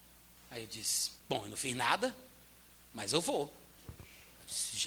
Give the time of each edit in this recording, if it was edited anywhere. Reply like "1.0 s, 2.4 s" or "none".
1.2 s, 3.8 s